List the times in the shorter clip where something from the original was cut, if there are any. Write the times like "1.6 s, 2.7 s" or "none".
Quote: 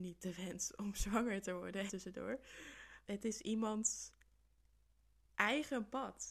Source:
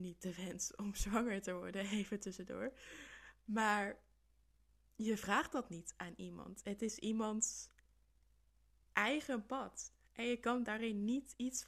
1.9 s, 3.0 s